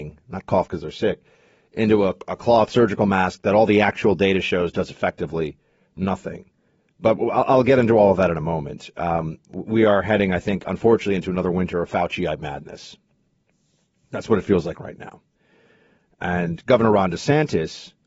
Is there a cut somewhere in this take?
no; 0 cuts

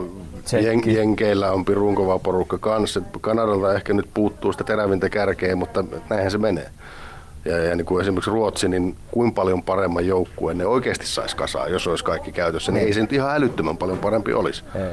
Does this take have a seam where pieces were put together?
no; 0 cuts

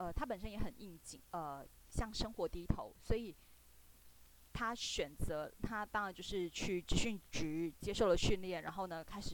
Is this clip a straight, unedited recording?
no; 1 cut; at 1.3 s

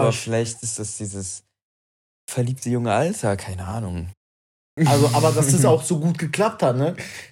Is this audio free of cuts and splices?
no; 1 cut; at 4.8 s

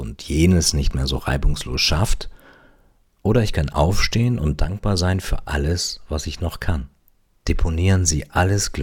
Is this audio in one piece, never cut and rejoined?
no; 1 cut; at 7.4 s

